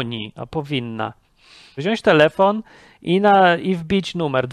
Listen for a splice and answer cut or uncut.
cut